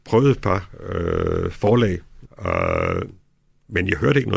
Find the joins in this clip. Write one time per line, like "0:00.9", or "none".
0:02.2